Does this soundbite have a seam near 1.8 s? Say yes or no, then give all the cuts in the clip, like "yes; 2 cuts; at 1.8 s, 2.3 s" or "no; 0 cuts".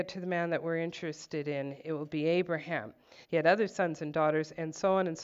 no; 1 cut; at 3.2 s